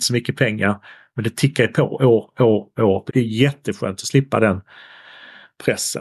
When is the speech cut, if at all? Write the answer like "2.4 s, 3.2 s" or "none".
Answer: 3.1 s